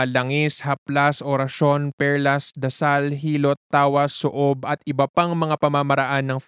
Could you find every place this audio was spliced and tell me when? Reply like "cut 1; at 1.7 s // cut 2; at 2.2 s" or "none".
none